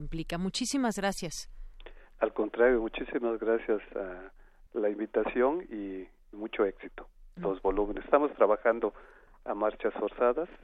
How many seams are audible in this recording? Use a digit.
2